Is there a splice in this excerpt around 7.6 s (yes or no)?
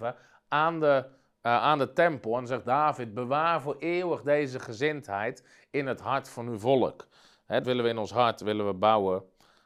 yes